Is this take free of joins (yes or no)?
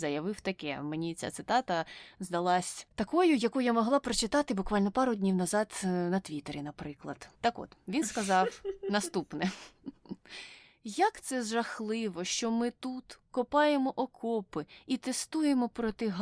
no